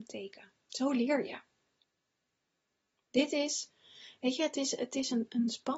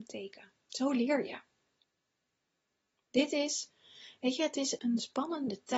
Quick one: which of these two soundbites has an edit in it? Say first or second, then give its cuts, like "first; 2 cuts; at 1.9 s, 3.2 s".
second; 1 cut; at 4.8 s